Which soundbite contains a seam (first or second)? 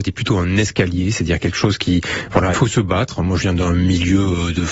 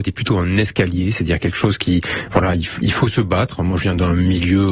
first